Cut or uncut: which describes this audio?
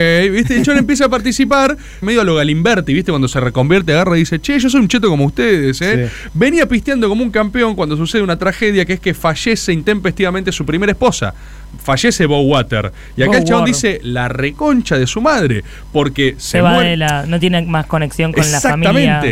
cut